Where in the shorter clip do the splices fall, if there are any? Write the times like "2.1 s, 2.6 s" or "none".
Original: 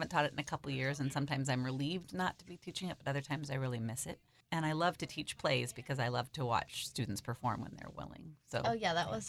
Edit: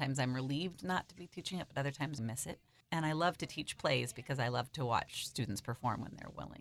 2.2 s